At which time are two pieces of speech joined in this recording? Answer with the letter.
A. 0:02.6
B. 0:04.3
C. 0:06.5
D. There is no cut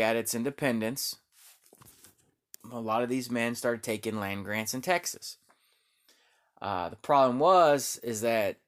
A